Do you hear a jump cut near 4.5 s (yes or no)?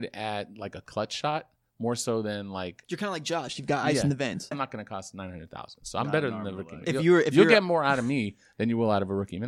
yes